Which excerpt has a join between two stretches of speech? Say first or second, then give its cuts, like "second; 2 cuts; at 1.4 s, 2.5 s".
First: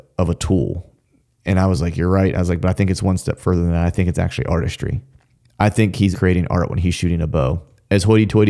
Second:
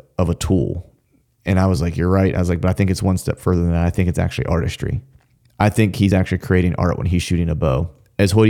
first; 1 cut; at 6.1 s